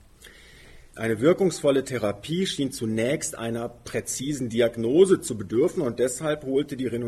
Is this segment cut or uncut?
cut